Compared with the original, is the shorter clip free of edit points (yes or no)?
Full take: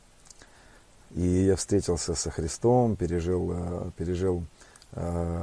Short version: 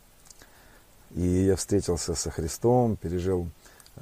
no